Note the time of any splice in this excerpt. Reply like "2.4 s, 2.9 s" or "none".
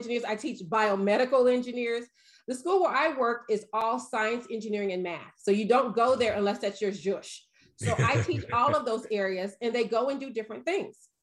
none